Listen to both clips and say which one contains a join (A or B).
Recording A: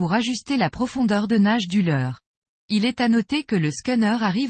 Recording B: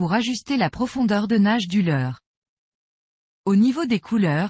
A